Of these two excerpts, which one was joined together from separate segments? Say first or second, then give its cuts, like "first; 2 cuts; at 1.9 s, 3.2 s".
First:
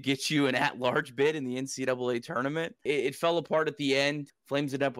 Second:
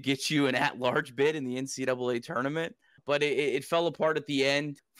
first; 1 cut; at 2.9 s